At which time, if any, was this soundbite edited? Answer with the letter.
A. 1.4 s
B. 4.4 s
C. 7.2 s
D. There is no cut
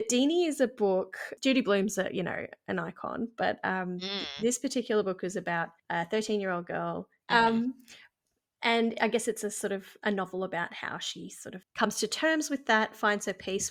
C